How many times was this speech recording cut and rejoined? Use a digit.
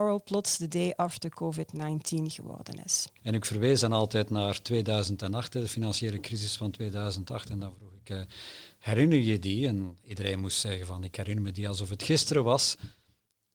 1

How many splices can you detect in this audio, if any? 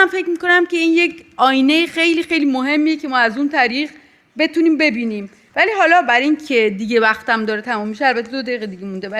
0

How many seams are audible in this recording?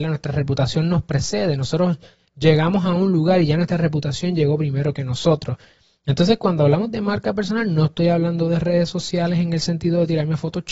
0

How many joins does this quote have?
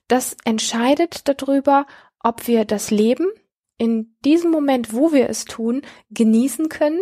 0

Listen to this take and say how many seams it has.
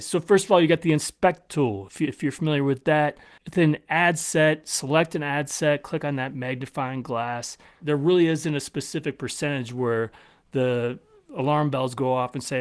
1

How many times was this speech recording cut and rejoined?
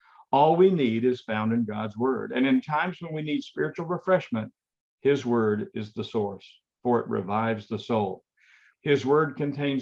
1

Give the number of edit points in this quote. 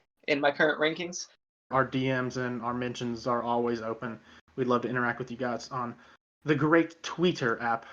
1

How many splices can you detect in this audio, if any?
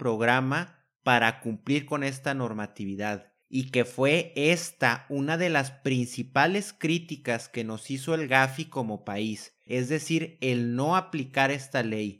2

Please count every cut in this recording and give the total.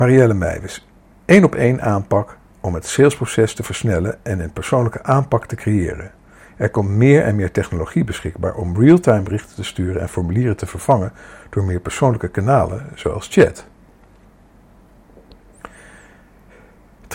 0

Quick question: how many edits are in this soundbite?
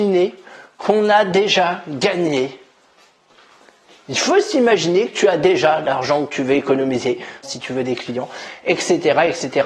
1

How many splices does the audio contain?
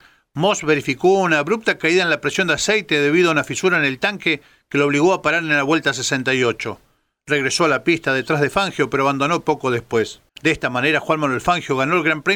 1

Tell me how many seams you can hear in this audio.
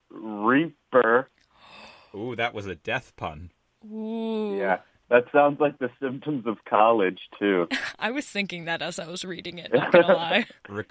1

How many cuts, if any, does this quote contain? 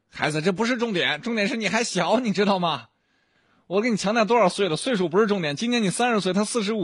0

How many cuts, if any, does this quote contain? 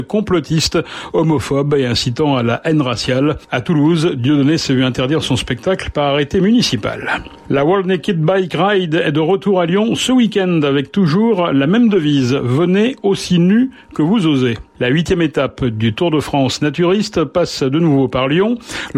0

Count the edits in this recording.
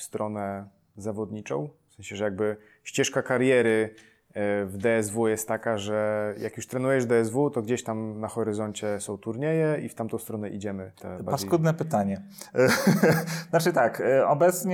2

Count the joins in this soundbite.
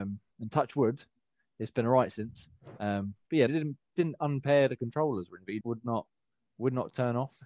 2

